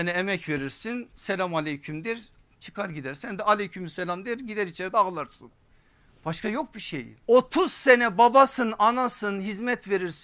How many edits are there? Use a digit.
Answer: 1